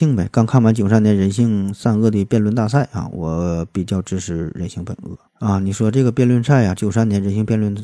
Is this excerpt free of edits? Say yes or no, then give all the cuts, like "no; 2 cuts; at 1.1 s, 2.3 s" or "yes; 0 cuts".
no; 2 cuts; at 5.3 s, 6.8 s